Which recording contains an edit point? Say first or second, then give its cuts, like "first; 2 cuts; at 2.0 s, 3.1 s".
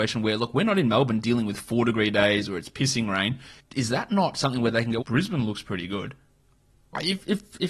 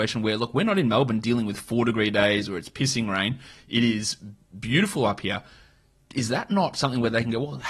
first; 2 cuts; at 3.6 s, 5.0 s